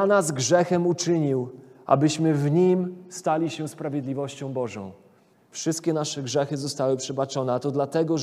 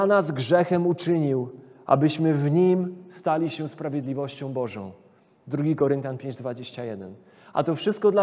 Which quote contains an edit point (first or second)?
first